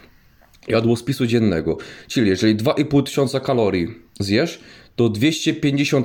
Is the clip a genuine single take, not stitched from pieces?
yes; 0 cuts

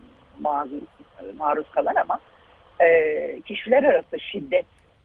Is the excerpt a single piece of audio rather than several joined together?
yes; 0 cuts

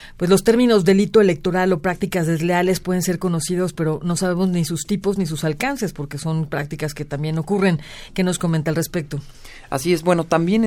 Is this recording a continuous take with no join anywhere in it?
yes; 0 cuts

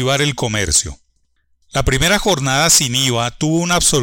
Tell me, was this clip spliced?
no; 0 cuts

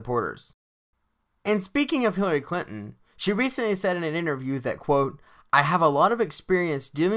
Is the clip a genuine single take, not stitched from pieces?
yes; 0 cuts

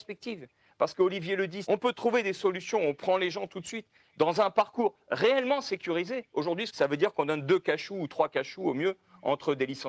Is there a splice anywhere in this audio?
yes; 2 cuts; at 1.6 s, 6.7 s

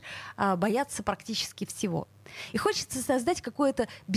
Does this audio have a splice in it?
no; 0 cuts

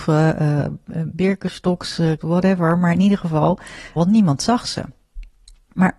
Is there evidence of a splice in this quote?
yes; 2 cuts; at 2.2 s, 4.0 s

